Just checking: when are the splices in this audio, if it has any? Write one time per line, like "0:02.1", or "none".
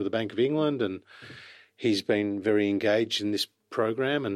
none

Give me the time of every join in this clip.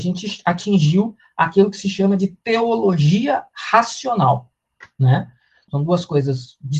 0:05.7

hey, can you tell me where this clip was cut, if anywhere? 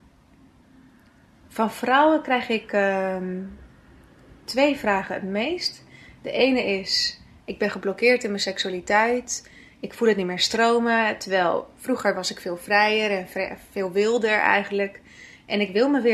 none

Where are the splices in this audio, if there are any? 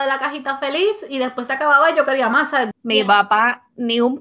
0:02.7

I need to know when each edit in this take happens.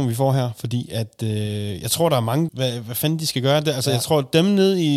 0:02.5

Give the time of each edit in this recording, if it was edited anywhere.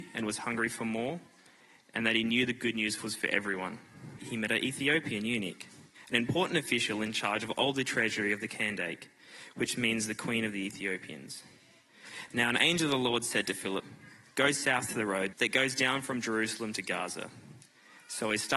0:04.2
0:12.3
0:15.3

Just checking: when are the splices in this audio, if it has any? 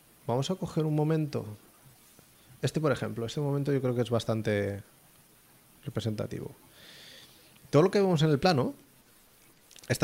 none

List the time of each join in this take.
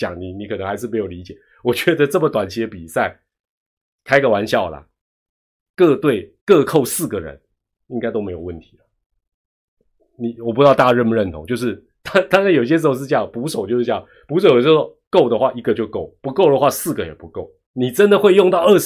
0:06.4
0:17.7

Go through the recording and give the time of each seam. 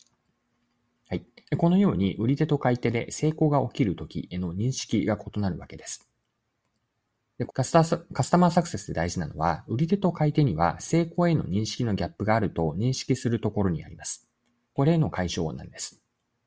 0:01.4
0:07.5
0:14.6

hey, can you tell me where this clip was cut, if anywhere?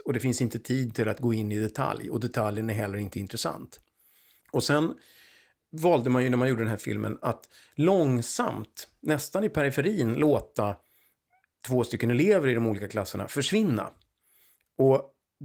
none

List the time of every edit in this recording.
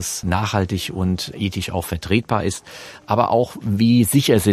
none

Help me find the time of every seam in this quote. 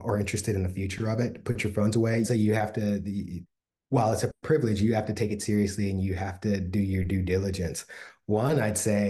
0:02.2

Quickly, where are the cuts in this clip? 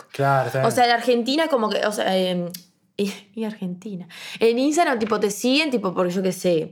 none

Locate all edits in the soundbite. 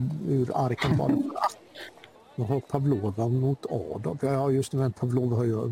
0:02.1

